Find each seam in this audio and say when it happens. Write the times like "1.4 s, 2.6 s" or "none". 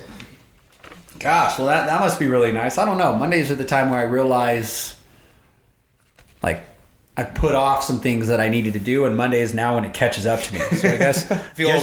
none

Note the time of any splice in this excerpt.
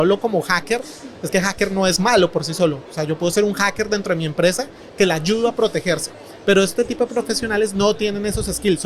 none

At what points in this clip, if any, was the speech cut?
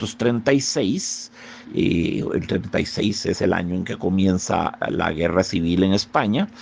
1.6 s

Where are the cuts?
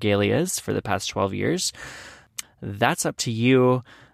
2.4 s

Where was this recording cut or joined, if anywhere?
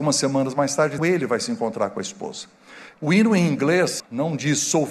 1.0 s, 2.9 s, 4.0 s

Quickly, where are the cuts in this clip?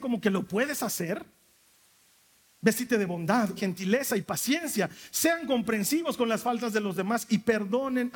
3.6 s

